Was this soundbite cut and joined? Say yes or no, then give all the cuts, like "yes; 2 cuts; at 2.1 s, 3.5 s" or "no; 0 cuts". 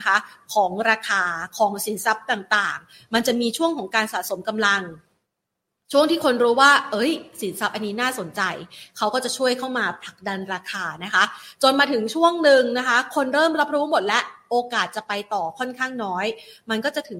no; 0 cuts